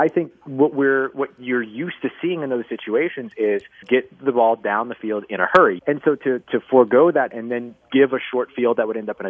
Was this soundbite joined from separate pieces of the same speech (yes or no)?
yes